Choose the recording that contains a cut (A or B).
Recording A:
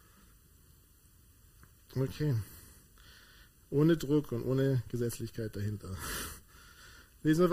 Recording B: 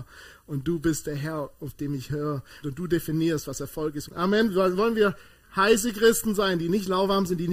B